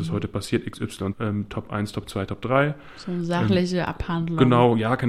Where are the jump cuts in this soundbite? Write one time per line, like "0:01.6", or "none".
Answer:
0:01.1